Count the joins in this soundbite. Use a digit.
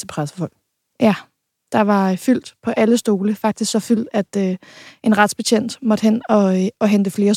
0